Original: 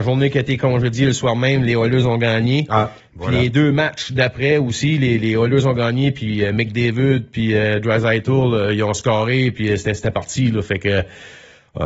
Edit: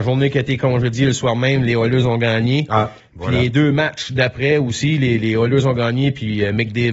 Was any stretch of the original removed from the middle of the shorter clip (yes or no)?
no